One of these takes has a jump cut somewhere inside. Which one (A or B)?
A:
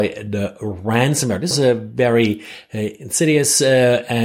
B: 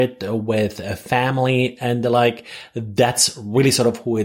A